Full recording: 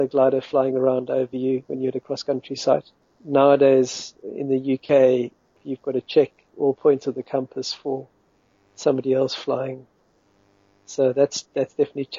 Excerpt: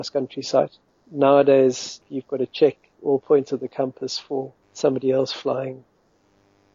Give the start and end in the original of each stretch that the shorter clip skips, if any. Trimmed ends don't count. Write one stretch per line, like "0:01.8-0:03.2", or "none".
0:04.1-0:05.6
0:08.2-0:08.6